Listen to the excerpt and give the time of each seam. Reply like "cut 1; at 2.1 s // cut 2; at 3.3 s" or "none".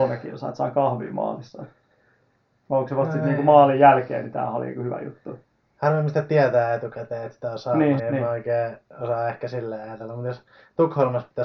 cut 1; at 8.0 s